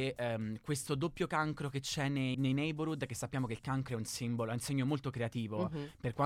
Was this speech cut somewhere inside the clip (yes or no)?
yes